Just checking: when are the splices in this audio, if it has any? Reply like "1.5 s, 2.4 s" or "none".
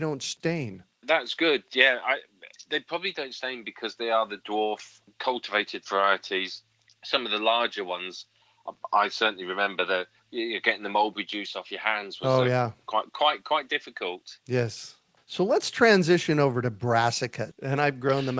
17.5 s